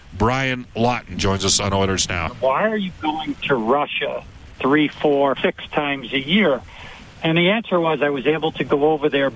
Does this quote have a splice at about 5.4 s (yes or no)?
yes